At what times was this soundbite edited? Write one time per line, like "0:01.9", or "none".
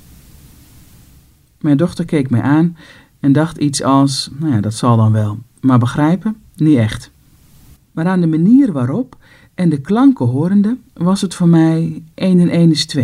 0:07.8
0:10.9